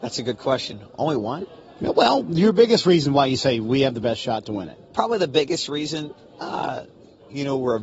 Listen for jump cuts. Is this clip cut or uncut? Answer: uncut